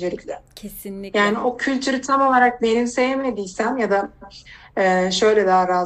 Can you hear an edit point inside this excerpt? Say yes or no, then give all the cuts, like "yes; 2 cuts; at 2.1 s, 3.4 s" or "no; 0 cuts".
no; 0 cuts